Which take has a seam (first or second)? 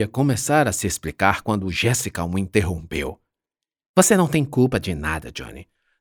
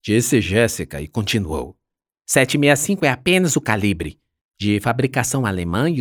second